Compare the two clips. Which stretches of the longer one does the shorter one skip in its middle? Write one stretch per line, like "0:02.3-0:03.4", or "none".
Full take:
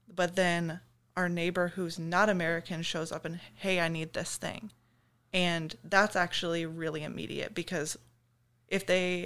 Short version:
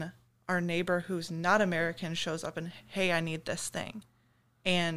none